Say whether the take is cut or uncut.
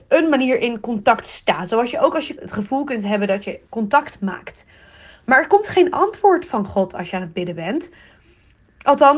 cut